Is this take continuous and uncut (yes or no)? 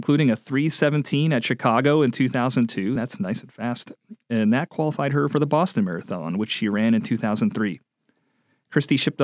yes